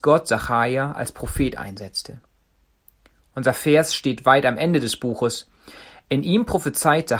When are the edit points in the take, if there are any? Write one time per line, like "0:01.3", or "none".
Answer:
none